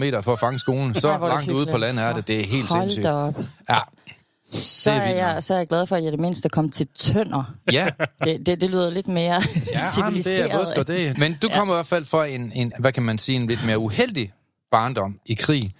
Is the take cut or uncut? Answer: cut